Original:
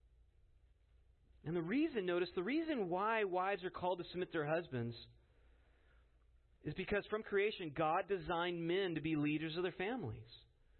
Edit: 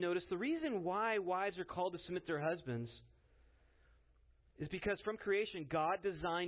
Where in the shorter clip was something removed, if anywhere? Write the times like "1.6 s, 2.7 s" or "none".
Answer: none